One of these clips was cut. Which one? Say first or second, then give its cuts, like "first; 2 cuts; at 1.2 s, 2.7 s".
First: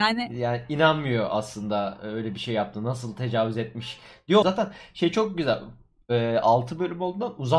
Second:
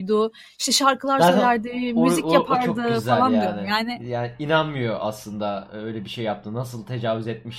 first; 1 cut; at 4.4 s